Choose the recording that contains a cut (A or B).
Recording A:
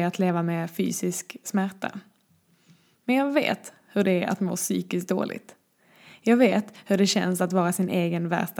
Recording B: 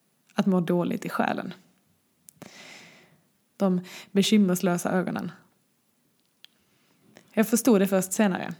B